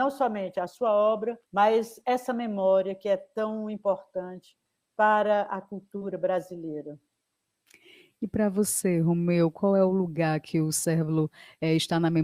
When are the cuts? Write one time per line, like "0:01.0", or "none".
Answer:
0:01.5